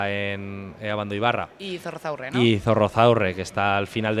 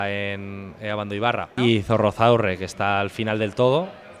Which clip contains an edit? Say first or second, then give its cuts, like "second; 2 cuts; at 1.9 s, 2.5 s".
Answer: second; 1 cut; at 1.6 s